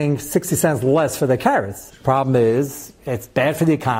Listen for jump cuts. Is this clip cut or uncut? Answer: cut